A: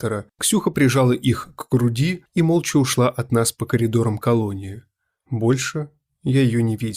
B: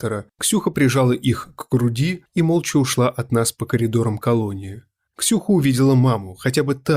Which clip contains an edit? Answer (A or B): B